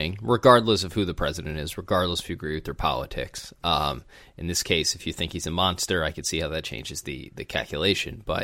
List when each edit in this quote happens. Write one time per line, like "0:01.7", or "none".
none